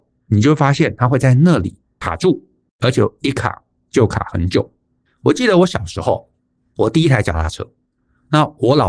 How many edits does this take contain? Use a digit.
1